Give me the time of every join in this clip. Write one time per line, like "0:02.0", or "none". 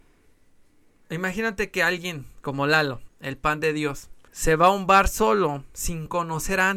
0:03.1
0:04.3